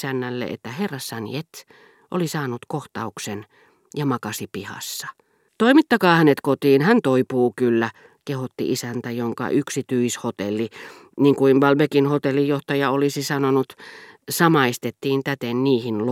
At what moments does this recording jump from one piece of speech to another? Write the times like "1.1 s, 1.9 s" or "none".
5.5 s